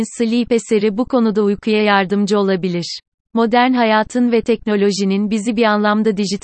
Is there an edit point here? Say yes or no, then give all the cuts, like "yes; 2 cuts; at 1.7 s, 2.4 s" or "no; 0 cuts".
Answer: no; 0 cuts